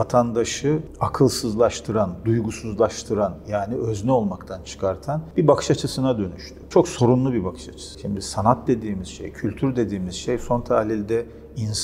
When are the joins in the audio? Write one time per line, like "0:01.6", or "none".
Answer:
none